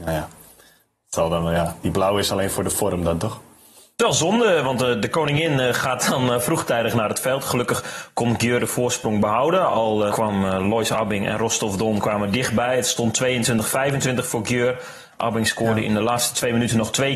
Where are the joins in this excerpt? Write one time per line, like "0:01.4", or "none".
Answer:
0:10.1